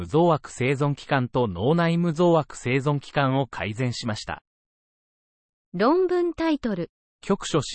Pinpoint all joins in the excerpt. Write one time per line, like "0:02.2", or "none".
none